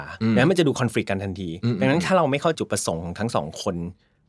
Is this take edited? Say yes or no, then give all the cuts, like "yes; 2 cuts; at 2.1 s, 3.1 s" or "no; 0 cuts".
yes; 1 cut; at 2.5 s